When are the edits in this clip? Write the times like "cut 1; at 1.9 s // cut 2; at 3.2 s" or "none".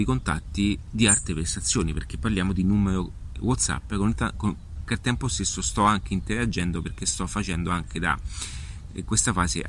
none